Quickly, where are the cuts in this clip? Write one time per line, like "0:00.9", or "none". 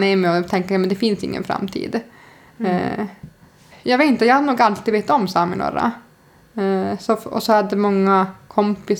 0:03.7